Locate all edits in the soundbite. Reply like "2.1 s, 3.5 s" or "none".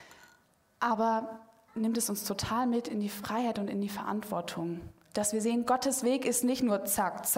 1.7 s, 5.1 s